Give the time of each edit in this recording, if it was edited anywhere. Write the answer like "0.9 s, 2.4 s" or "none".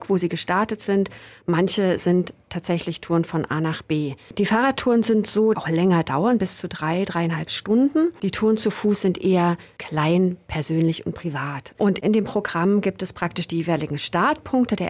5.5 s, 11.8 s